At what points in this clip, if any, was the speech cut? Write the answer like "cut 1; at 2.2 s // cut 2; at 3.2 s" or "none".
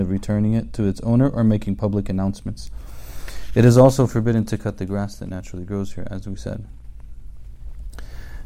none

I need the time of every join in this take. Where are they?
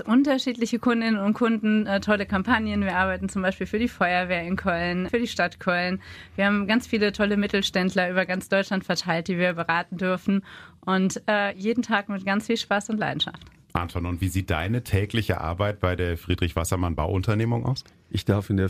cut 1; at 5.1 s // cut 2; at 11.5 s

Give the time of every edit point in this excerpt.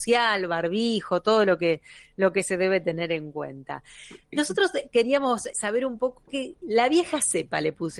cut 1; at 5.5 s // cut 2; at 6.6 s

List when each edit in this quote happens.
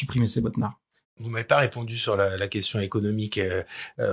none

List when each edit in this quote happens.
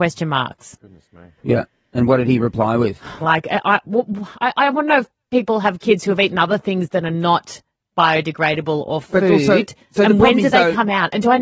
cut 1; at 3.2 s

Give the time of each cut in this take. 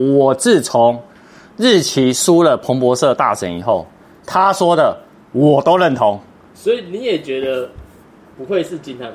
none

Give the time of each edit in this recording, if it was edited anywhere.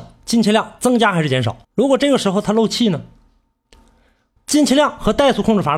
cut 1; at 1.6 s

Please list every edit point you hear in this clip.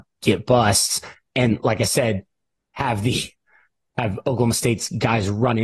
none

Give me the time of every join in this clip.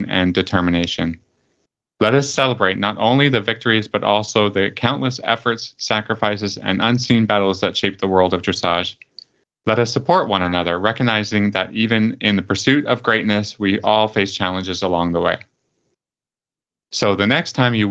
cut 1; at 16.8 s

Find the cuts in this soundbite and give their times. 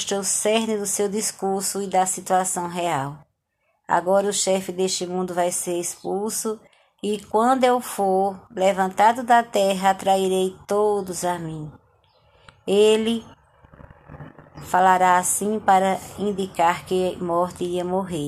none

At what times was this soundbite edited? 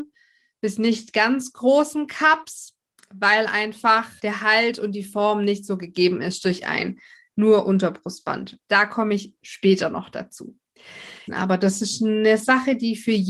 cut 1; at 4.2 s // cut 2; at 8.6 s // cut 3; at 11.3 s

